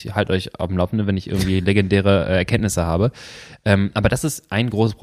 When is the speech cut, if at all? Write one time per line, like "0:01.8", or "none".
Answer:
none